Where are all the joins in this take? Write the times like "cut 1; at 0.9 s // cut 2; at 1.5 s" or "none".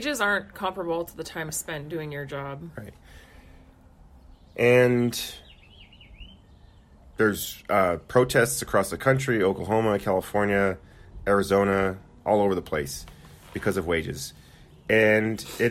none

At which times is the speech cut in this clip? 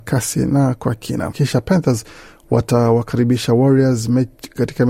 cut 1; at 1.3 s

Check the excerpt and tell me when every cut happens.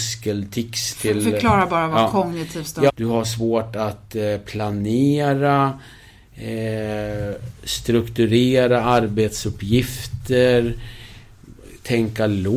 cut 1; at 2.9 s

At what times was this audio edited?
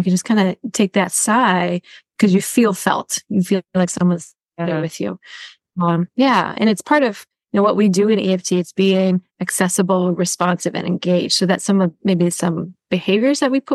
none

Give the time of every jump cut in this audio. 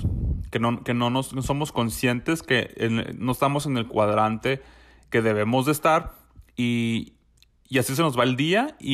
none

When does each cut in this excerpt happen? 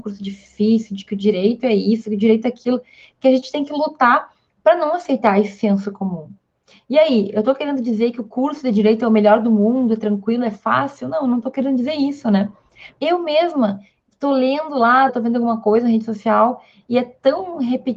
cut 1; at 13.0 s // cut 2; at 15.1 s

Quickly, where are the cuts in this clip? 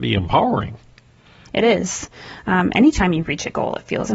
cut 1; at 1.5 s

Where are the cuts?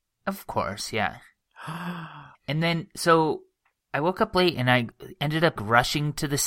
cut 1; at 2.3 s // cut 2; at 5.6 s

